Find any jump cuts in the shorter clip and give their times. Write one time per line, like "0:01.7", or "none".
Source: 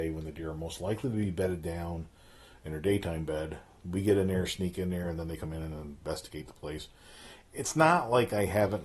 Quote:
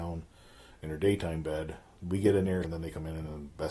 0:02.6